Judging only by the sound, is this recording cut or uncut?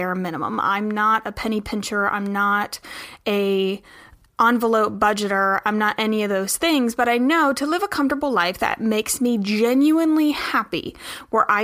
uncut